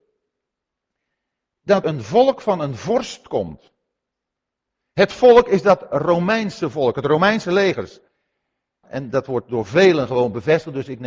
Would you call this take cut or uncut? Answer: cut